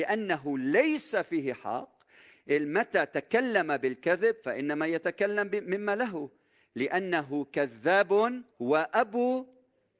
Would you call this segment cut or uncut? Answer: cut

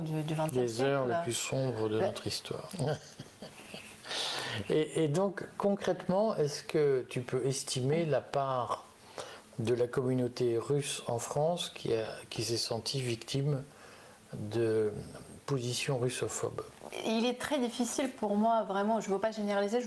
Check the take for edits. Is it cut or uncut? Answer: cut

